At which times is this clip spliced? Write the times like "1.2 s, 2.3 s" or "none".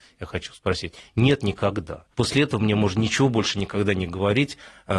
2.1 s